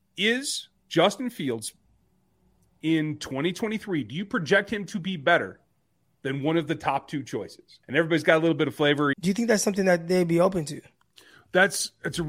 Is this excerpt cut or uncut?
cut